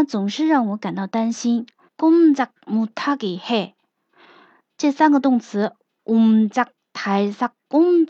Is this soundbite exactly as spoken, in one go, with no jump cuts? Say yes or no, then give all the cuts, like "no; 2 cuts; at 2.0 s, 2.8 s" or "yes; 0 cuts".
no; 1 cut; at 1.9 s